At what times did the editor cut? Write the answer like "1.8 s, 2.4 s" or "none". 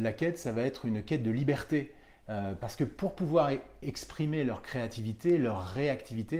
none